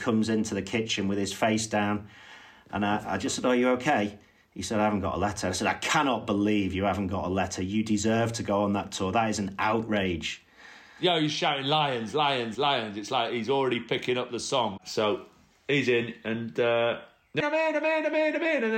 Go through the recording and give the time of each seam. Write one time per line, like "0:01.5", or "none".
0:12.6
0:17.4